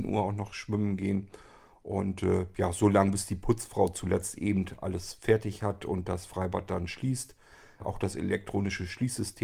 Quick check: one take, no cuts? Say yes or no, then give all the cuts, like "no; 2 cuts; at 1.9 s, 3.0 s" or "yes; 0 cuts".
no; 1 cut; at 7.8 s